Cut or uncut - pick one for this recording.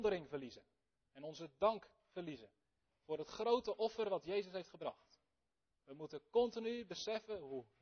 uncut